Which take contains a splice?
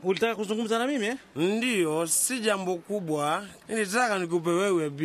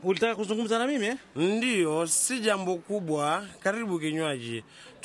first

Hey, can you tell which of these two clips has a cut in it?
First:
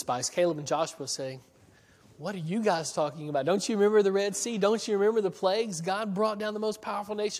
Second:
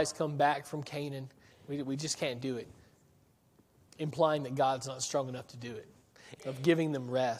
second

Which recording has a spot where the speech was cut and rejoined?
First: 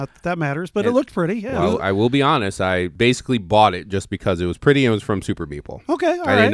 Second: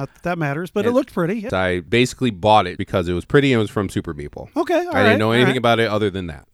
second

